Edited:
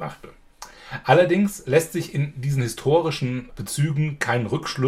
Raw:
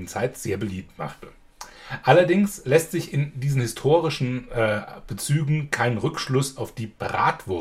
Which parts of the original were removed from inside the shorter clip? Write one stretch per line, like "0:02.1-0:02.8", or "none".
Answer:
0:04.5-0:05.0